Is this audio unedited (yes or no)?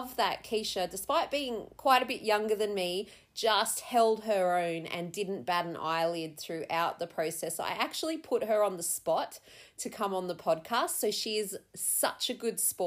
yes